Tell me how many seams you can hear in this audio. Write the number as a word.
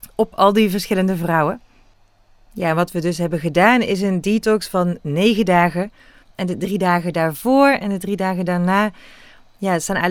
one